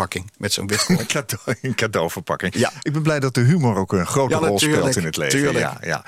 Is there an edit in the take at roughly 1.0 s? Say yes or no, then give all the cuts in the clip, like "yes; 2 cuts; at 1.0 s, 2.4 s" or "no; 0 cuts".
no; 0 cuts